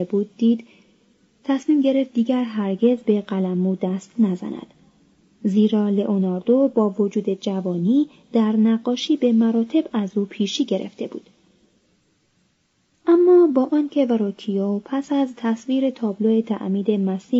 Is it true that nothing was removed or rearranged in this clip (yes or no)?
yes